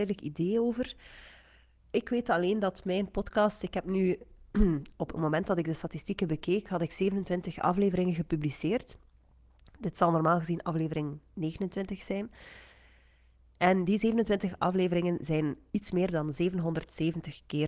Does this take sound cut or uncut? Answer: uncut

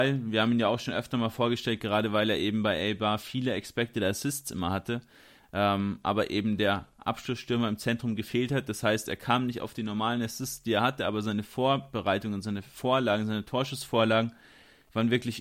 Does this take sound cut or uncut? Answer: uncut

